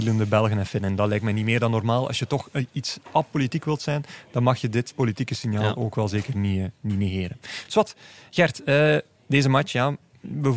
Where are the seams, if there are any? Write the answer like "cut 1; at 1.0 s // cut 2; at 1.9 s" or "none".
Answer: none

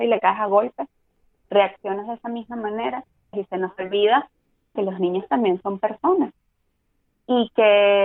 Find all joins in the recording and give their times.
cut 1; at 3.3 s // cut 2; at 4.8 s

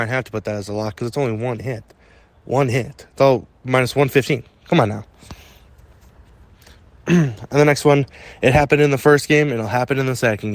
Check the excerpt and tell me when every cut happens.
none

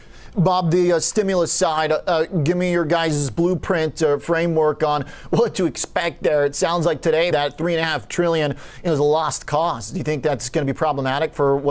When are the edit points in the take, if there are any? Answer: cut 1; at 7.3 s

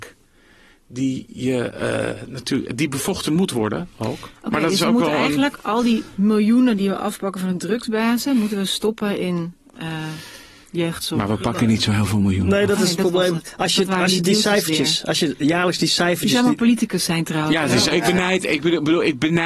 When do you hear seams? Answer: cut 1; at 17.9 s

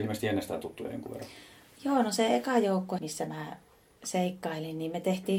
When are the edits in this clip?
cut 1; at 3.0 s

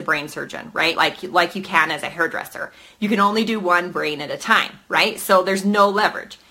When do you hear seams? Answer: cut 1; at 0.9 s

